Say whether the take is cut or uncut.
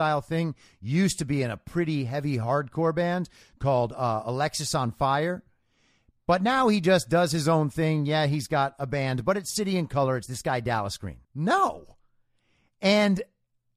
cut